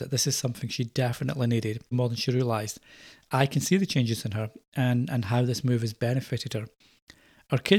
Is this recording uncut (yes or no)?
no